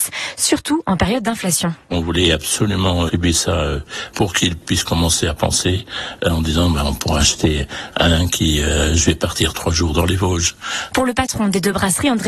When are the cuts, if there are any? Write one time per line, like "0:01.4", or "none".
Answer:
0:03.1
0:07.9
0:10.9